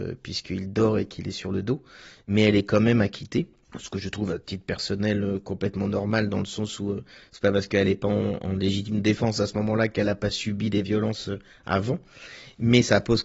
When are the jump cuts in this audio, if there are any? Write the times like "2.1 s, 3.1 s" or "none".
none